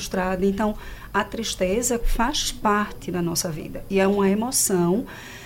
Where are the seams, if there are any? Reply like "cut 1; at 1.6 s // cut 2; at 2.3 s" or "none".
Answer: cut 1; at 2.0 s

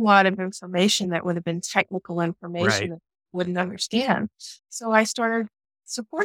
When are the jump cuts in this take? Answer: cut 1; at 4.6 s

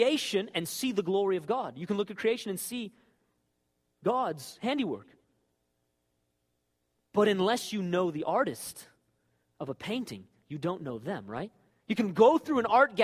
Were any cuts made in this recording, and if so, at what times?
none

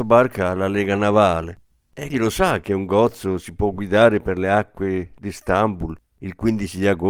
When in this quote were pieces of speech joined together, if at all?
cut 1; at 2.1 s

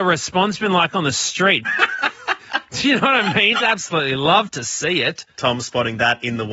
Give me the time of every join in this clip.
cut 1; at 1.6 s // cut 2; at 3.6 s

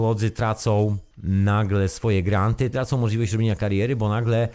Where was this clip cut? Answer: cut 1; at 1.1 s // cut 2; at 2.7 s

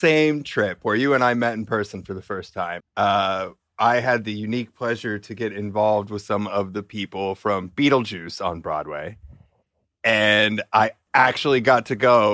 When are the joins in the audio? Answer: cut 1; at 2.8 s

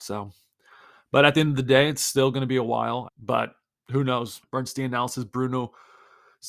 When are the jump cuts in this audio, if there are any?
cut 1; at 3.1 s // cut 2; at 4.4 s

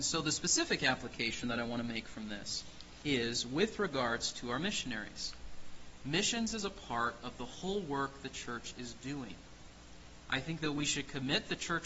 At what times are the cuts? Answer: cut 1; at 10.3 s

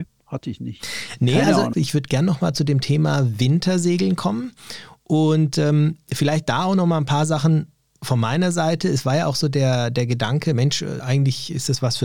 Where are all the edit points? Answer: cut 1; at 1.7 s // cut 2; at 11.0 s

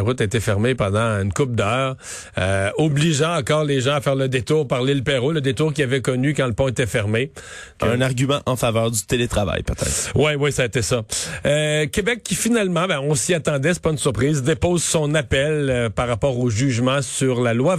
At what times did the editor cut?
cut 1; at 7.8 s

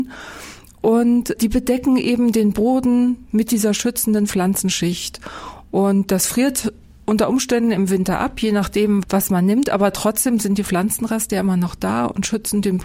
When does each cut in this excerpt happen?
none

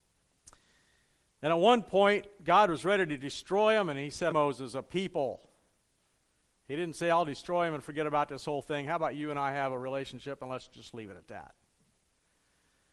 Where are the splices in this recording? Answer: cut 1; at 4.3 s

